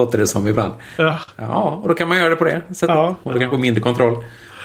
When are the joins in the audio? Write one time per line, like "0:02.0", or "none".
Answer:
0:03.2